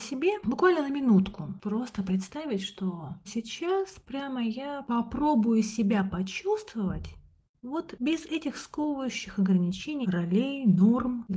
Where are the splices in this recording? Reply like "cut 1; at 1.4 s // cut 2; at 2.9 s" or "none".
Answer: cut 1; at 3.2 s // cut 2; at 10.0 s